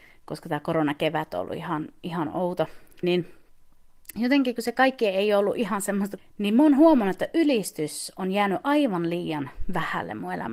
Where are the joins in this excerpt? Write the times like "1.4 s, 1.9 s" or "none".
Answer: 3.0 s, 6.2 s